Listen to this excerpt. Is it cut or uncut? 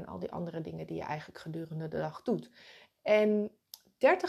cut